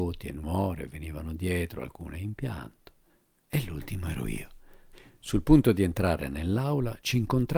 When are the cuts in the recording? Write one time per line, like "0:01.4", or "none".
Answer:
none